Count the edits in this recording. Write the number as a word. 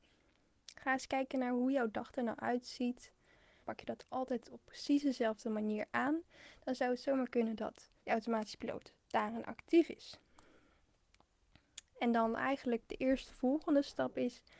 two